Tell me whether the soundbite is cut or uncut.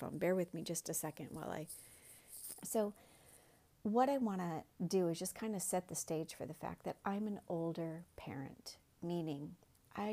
cut